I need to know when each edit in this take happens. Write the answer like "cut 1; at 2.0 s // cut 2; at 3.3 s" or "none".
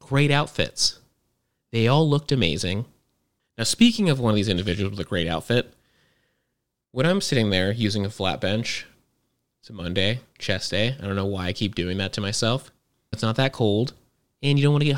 cut 1; at 3.4 s // cut 2; at 13.1 s